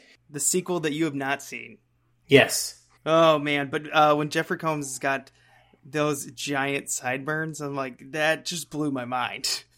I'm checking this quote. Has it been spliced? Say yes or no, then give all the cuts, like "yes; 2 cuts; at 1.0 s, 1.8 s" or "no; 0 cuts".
no; 0 cuts